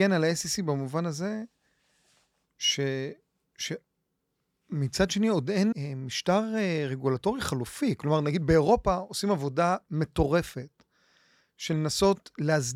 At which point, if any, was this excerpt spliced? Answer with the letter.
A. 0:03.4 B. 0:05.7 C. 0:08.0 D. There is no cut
B